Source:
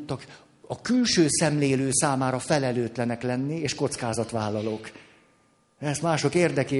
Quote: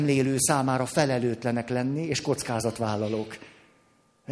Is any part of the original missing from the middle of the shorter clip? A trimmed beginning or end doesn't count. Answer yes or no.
no